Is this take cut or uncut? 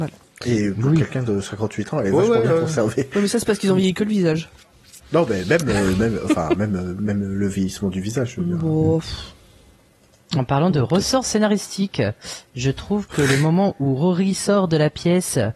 uncut